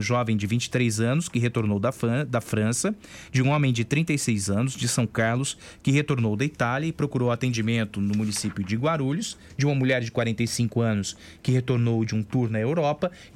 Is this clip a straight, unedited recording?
yes; 0 cuts

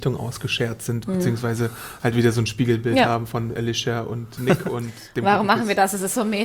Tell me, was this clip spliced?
yes; 1 cut; at 4.4 s

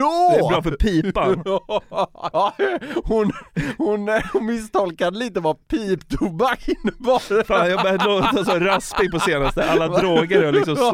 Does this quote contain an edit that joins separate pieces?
yes; 1 cut; at 2.3 s

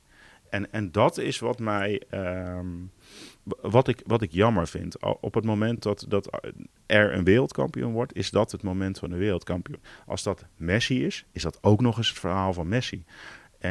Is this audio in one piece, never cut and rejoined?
yes; 0 cuts

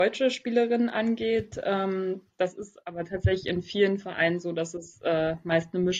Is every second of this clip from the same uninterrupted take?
yes; 0 cuts

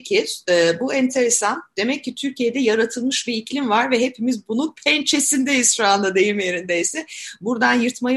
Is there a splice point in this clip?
no; 0 cuts

